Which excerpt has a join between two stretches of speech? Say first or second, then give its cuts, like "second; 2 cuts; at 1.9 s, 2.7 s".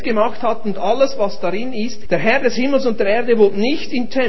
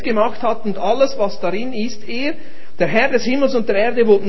first; 1 cut; at 2.0 s